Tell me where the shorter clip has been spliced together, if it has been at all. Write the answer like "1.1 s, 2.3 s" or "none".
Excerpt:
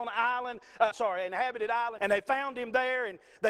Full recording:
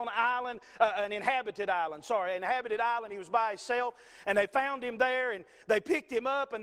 0.9 s, 2.0 s